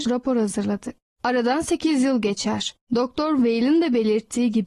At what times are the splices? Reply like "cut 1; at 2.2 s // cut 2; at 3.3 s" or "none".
cut 1; at 1.1 s // cut 2; at 2.9 s